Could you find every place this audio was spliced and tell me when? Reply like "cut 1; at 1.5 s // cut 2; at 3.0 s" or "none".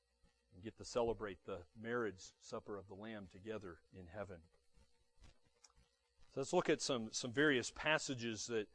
cut 1; at 3.8 s